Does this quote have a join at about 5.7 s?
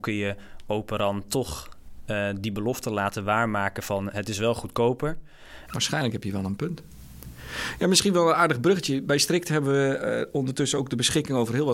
yes; 1 cut; at 5.7 s

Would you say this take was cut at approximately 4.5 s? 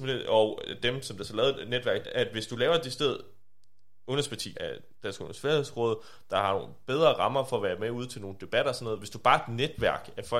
yes; 2 cuts; at 2.0 s, 4.5 s

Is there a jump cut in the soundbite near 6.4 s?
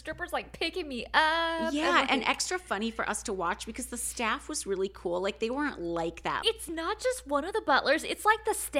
yes; 1 cut; at 6.4 s

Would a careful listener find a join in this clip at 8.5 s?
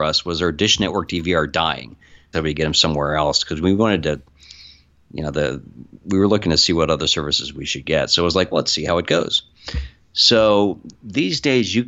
yes; 2 cuts; at 2.3 s, 8.5 s

